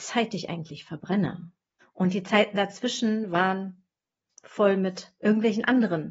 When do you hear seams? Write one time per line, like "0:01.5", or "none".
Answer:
0:01.8